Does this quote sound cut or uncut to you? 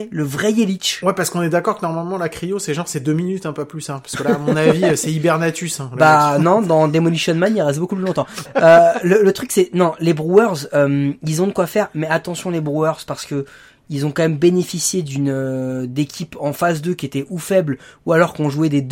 cut